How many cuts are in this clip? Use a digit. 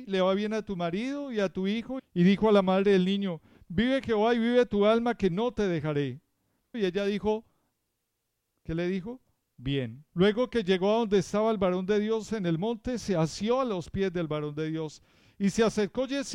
3